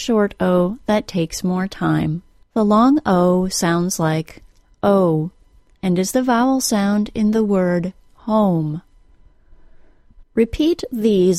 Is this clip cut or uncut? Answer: cut